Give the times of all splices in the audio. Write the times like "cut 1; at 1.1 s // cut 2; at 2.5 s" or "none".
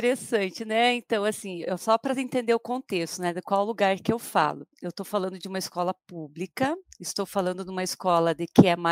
none